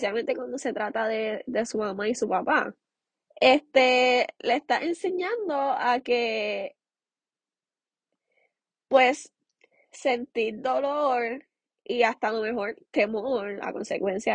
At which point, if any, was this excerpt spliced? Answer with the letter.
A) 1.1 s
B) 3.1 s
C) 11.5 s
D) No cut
B